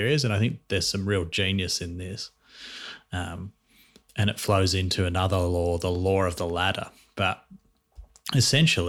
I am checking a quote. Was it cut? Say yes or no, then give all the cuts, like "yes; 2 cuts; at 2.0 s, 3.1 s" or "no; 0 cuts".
no; 0 cuts